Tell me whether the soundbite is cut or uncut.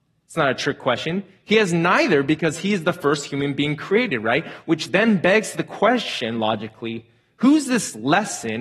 uncut